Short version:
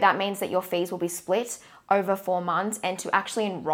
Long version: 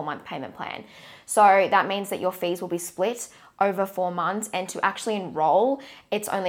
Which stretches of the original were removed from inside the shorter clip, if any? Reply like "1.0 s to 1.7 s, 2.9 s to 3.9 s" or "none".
none